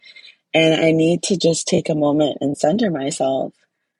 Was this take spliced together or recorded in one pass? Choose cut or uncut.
uncut